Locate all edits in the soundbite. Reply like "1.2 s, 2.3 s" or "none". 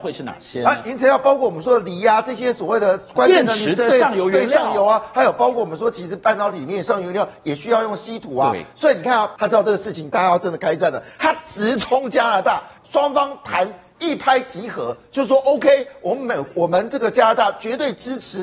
9.4 s, 12.8 s